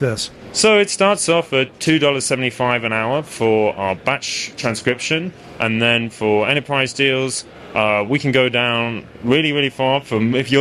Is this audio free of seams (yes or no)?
yes